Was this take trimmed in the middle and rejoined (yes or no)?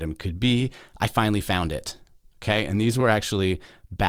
no